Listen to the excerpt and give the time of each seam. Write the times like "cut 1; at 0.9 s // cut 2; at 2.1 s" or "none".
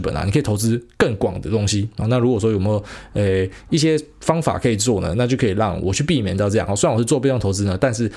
cut 1; at 2.0 s